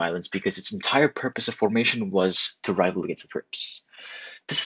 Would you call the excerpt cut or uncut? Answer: uncut